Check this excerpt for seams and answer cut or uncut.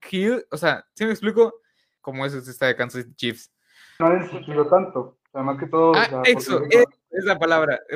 cut